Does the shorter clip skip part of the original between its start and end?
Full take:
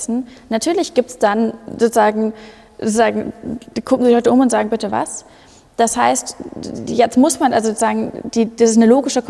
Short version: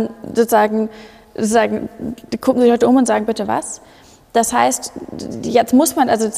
no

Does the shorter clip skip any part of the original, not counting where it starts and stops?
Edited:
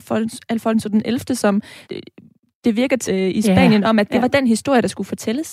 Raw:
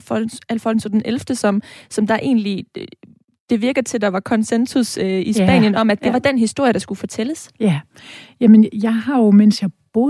yes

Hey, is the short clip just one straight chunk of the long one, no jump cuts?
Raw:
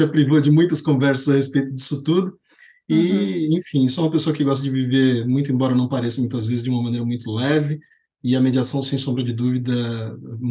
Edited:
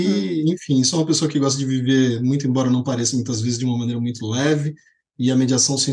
yes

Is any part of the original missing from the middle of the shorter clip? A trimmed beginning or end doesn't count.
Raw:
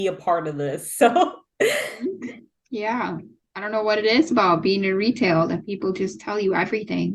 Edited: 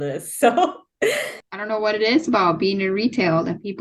yes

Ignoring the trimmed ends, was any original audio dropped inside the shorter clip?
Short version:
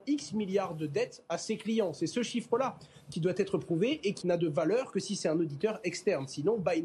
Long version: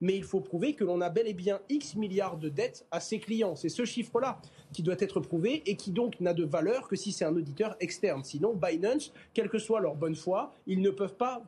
yes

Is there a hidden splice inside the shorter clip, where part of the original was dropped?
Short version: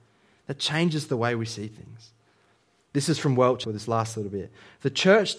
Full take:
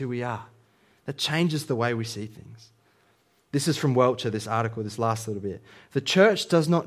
yes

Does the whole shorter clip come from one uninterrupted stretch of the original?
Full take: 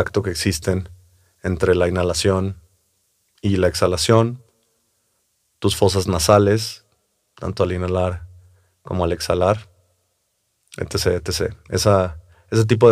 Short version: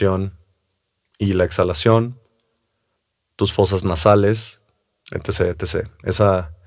no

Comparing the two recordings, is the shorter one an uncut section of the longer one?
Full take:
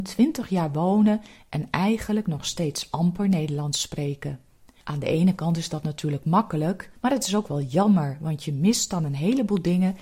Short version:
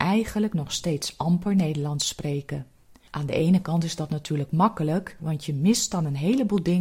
no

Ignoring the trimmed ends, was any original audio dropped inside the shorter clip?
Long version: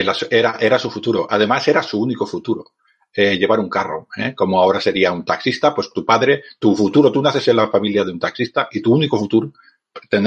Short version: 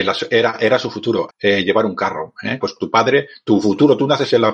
yes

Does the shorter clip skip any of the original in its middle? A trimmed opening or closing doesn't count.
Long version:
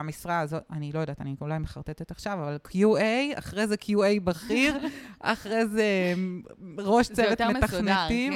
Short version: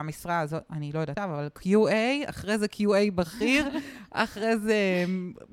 yes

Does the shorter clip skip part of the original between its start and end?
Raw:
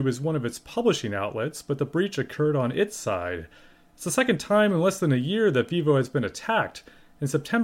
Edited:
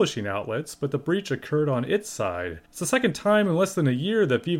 yes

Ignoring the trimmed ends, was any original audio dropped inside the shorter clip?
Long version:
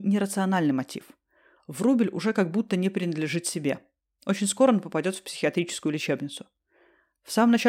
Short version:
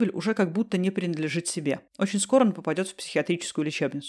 yes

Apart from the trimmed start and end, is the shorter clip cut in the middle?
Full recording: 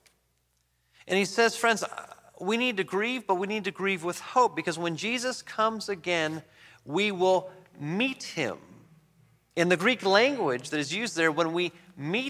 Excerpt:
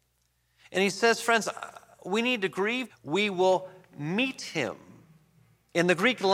yes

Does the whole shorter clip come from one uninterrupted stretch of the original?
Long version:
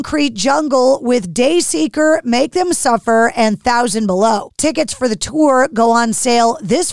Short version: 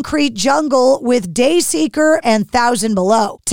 no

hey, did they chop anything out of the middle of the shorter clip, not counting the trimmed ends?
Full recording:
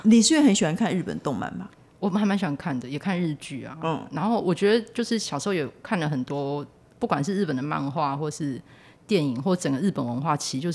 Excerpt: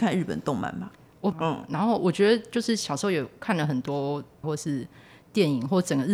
yes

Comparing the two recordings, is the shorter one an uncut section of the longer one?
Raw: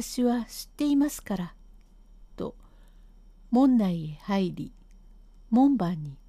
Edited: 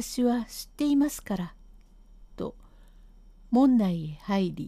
yes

